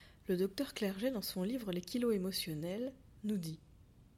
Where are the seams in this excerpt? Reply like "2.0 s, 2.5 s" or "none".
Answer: none

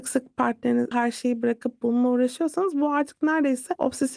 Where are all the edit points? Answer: 0.9 s

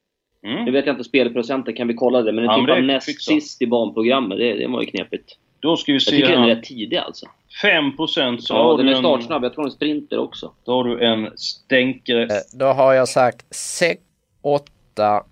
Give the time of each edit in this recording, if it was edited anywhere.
12.3 s, 13.5 s

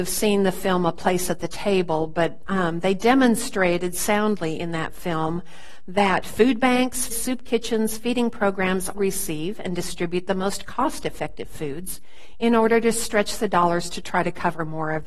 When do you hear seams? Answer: 7.1 s, 8.9 s

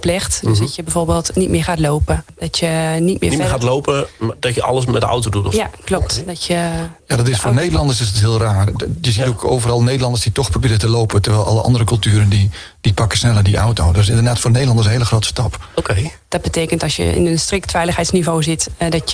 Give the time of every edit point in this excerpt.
16.3 s

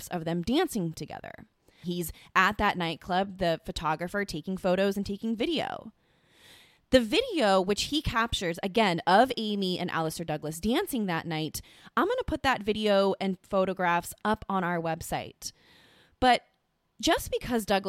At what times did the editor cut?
1.8 s

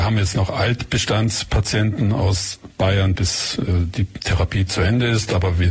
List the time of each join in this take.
3.1 s

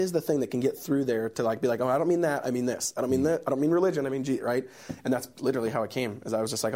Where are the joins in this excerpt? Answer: none

